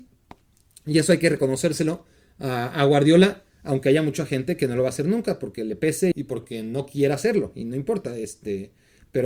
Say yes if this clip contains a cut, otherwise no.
yes